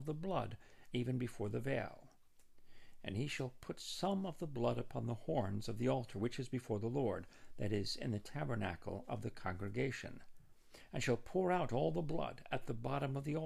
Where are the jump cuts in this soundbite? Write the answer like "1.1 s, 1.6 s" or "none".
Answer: 0.9 s